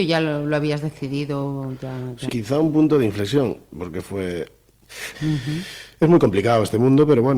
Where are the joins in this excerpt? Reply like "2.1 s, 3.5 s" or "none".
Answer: 2.3 s, 5.1 s